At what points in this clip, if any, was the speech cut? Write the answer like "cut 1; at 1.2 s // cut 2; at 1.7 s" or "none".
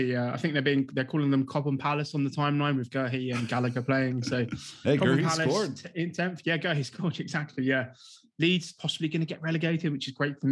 none